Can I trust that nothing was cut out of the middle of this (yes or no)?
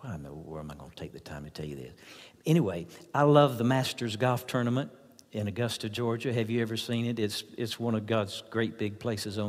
yes